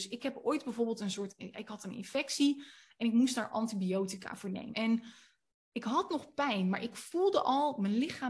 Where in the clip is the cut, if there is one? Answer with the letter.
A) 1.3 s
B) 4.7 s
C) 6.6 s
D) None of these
B